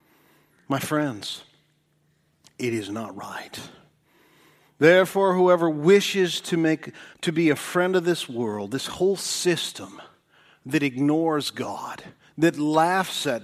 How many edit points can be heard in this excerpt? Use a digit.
1